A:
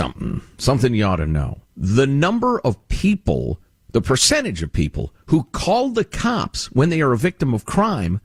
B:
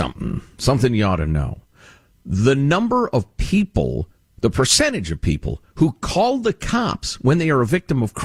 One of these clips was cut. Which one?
A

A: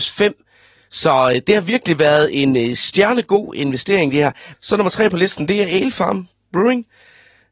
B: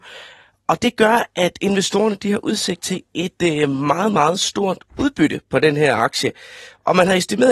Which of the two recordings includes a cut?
A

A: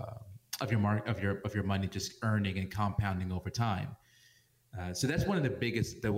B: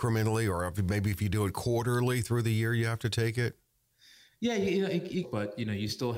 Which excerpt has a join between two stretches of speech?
B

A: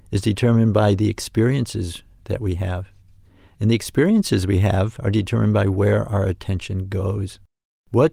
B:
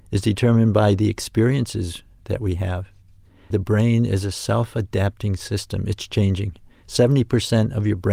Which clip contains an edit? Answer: B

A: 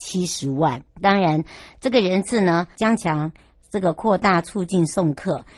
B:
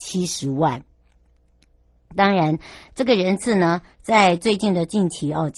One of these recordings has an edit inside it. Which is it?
A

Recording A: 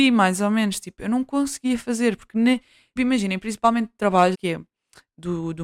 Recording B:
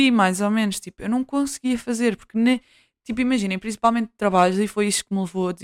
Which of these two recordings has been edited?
A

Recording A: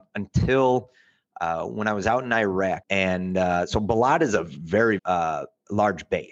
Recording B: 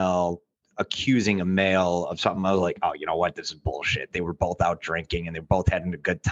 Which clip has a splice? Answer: A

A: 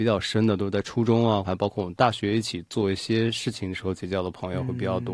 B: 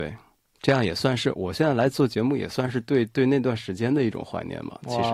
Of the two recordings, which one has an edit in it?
A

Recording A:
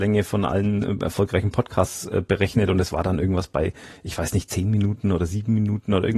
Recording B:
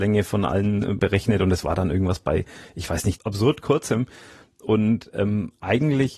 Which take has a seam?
B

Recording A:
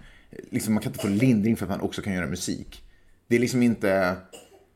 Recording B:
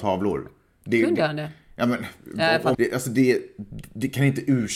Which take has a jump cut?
B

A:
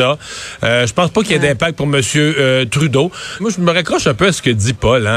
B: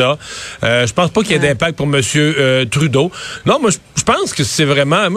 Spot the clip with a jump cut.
A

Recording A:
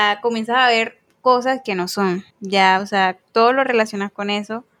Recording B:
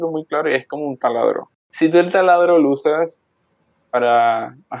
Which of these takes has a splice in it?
A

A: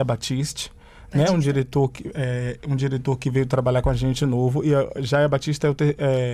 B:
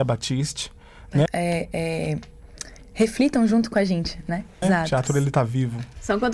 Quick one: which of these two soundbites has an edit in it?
B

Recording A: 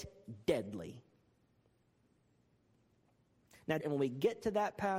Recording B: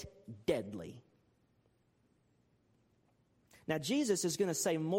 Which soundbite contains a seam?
A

